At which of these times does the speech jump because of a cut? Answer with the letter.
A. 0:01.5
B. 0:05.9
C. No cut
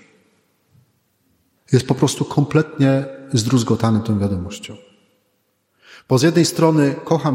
A